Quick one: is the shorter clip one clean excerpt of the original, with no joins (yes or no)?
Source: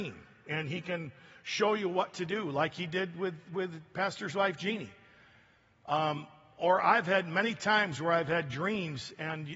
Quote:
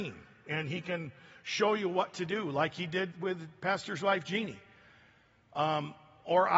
no